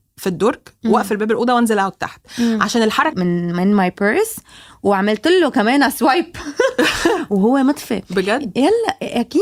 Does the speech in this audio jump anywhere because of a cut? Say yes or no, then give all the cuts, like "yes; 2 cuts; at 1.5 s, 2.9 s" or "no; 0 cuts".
yes; 1 cut; at 3.1 s